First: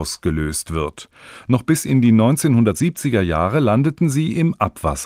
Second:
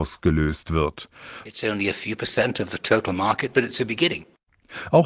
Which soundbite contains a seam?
second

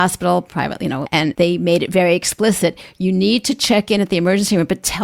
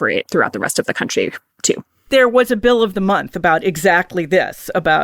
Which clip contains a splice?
first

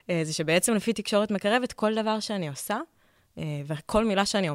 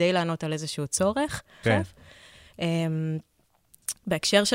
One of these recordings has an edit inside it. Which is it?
second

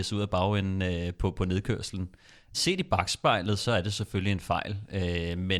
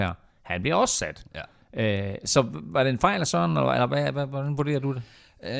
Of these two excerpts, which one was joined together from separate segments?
first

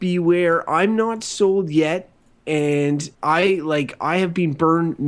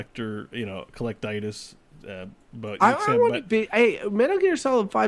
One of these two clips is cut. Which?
first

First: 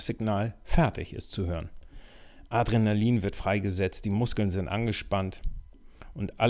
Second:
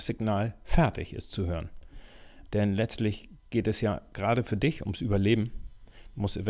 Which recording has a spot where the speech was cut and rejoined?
second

